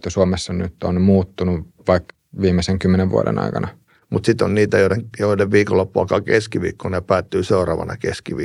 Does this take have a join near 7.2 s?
no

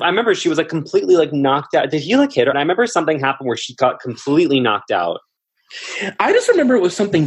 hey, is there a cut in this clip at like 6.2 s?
no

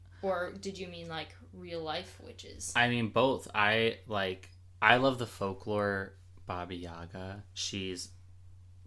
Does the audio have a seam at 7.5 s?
yes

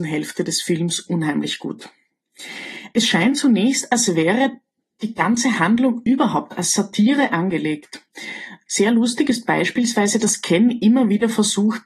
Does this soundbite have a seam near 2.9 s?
no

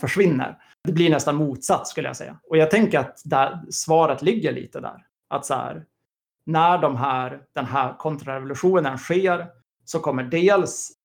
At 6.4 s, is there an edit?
no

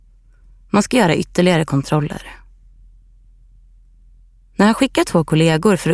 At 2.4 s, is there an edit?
no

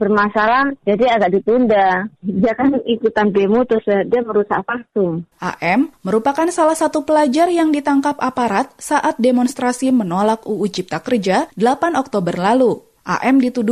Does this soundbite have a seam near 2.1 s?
no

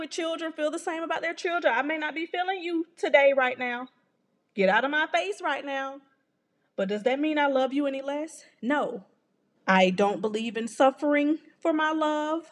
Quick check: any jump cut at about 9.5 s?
yes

